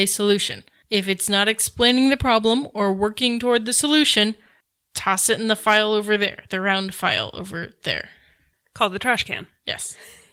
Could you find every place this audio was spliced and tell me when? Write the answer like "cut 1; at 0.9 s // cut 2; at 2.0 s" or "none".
none

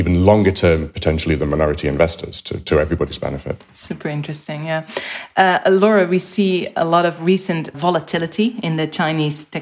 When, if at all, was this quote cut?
cut 1; at 7.7 s

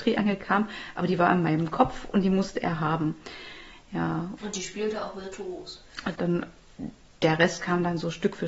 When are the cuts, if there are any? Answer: cut 1; at 4.4 s // cut 2; at 6.2 s

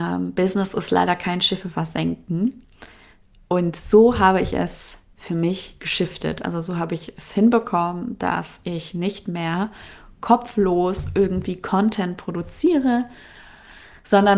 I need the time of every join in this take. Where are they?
none

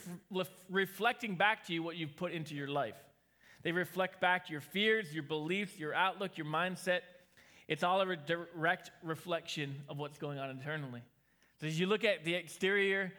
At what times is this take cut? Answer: none

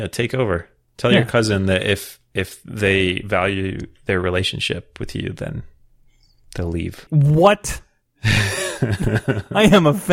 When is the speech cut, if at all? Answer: cut 1; at 7.1 s

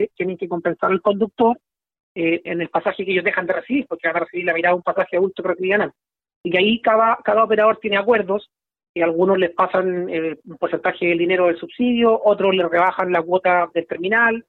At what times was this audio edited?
cut 1; at 2.5 s

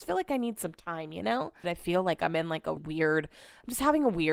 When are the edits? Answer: cut 1; at 1.6 s // cut 2; at 2.8 s

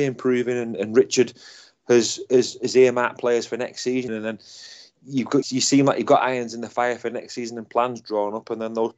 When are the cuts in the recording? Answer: cut 1; at 4.1 s // cut 2; at 5.4 s

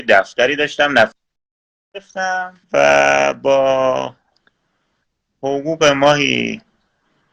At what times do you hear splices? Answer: cut 1; at 2.6 s

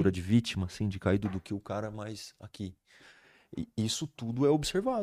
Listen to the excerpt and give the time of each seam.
none

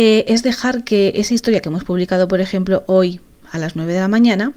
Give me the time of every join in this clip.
none

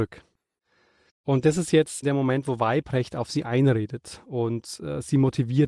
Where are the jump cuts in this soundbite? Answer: cut 1; at 1.1 s

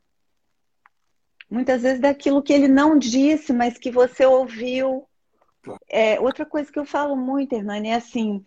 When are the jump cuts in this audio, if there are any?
cut 1; at 5.8 s

